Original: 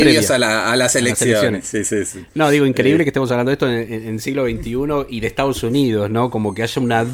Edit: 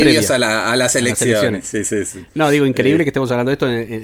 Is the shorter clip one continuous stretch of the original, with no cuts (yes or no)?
yes